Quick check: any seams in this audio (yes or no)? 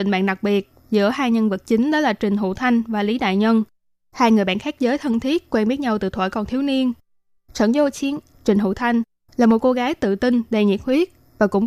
no